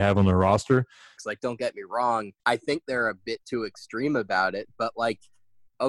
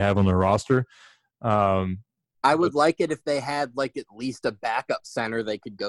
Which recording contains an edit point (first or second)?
first